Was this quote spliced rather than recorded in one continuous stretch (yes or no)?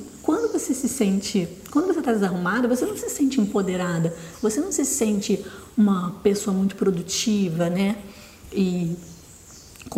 no